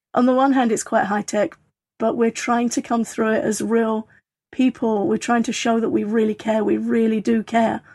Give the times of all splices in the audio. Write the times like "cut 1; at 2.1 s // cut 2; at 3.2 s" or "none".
none

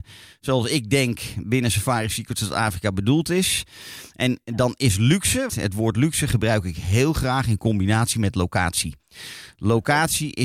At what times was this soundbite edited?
cut 1; at 5.5 s

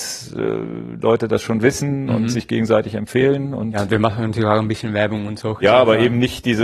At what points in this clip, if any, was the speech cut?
none

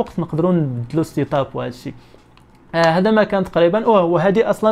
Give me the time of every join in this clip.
none

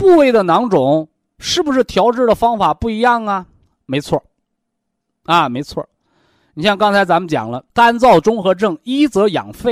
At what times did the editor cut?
cut 1; at 7.7 s

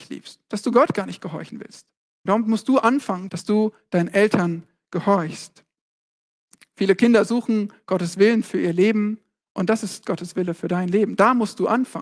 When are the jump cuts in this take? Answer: cut 1; at 2.3 s // cut 2; at 3.3 s

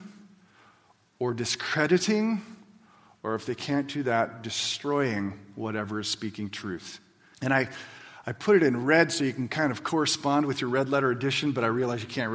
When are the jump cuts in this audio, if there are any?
cut 1; at 7.3 s

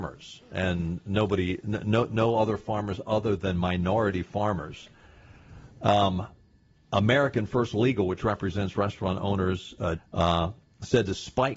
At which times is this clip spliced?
cut 1; at 10.0 s

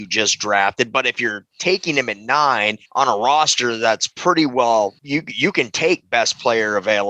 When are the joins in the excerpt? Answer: cut 1; at 2.9 s // cut 2; at 5.0 s

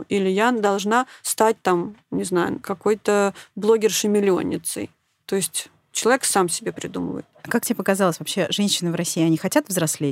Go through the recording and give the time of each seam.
none

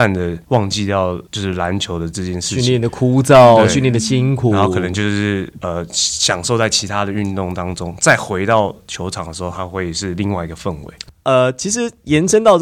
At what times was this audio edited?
none

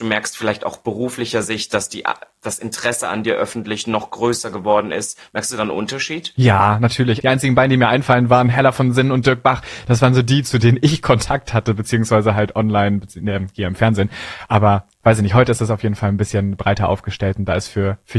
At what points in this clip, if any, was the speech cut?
cut 1; at 7.2 s

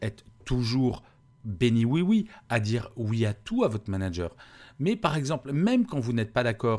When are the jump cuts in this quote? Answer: none

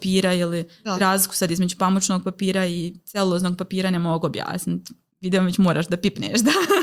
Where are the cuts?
none

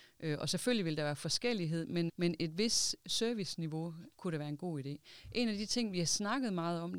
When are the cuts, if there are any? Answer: cut 1; at 2.1 s // cut 2; at 4.1 s

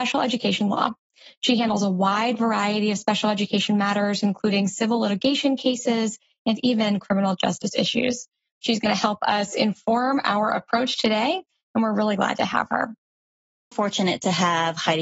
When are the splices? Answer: cut 1; at 13.7 s

